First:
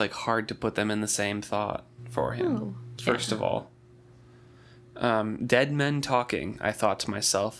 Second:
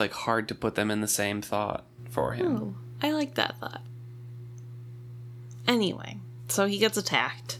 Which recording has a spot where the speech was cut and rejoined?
first; 1 cut; at 3.0 s

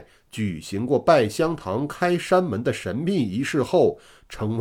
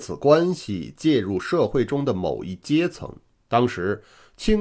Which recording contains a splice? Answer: second; 1 cut; at 3.4 s

